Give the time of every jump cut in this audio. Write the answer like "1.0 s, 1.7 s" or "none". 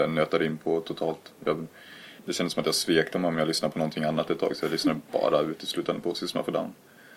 2.2 s